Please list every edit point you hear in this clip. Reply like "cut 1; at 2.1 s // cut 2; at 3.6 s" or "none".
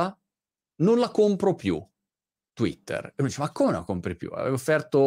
none